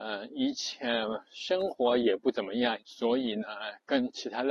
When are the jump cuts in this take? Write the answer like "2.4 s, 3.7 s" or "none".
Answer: 2.8 s